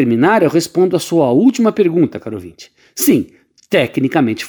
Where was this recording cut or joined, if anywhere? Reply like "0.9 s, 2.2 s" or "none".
none